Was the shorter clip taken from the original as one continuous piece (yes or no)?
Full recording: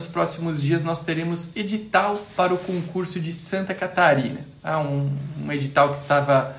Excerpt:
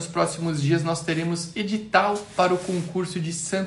yes